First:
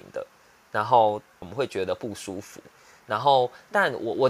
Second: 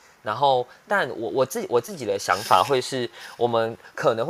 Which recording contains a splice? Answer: first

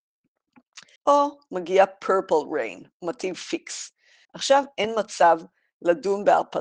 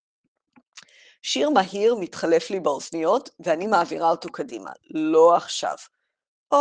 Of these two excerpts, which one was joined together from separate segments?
first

